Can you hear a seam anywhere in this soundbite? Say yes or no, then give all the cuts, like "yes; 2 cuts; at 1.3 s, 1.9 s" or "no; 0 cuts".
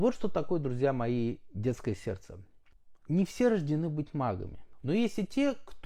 yes; 2 cuts; at 3.0 s, 4.8 s